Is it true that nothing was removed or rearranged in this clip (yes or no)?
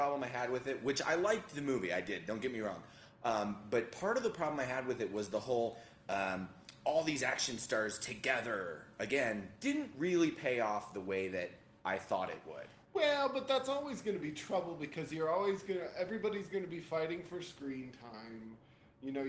yes